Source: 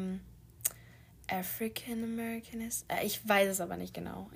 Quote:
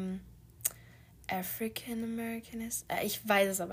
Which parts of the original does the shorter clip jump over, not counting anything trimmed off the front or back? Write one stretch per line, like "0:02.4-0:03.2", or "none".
none